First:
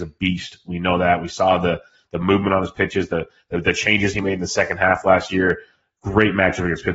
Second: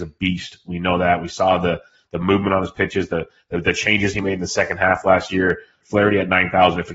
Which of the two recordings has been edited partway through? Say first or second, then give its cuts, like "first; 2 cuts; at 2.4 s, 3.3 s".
second; 1 cut; at 5.8 s